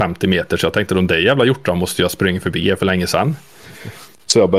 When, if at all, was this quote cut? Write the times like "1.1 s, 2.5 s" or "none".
none